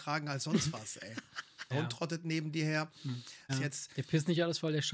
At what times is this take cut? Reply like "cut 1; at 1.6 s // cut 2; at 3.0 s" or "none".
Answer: cut 1; at 1.7 s // cut 2; at 3.5 s